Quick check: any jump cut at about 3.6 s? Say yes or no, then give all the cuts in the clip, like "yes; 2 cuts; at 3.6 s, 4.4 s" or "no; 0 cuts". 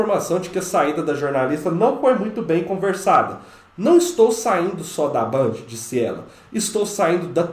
no; 0 cuts